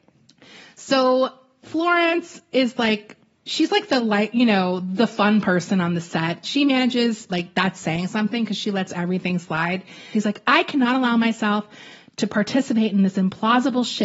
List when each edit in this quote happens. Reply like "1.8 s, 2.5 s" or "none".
7.3 s, 10.1 s